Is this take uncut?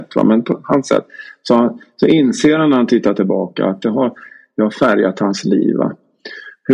yes; 0 cuts

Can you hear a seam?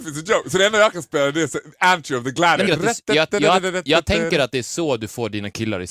yes; 1 cut; at 2.7 s

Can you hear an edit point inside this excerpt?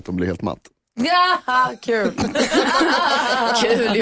no; 0 cuts

